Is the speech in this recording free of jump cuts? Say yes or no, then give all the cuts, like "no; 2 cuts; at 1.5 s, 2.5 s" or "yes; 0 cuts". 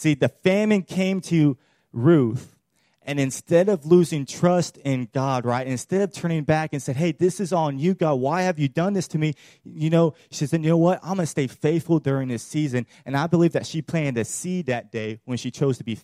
yes; 0 cuts